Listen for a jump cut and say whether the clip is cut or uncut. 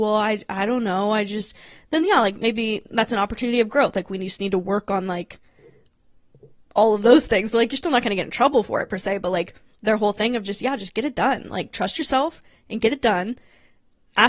uncut